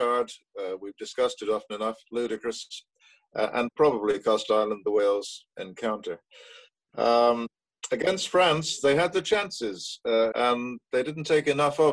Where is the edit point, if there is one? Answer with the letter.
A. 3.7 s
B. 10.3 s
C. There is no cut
B